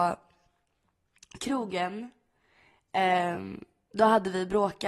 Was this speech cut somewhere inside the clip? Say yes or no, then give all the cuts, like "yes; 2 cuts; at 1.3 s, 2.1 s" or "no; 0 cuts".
no; 0 cuts